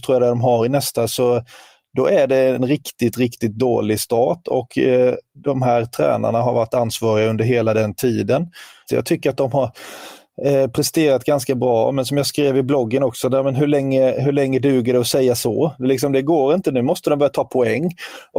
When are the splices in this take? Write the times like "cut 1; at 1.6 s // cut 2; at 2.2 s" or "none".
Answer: cut 1; at 8.9 s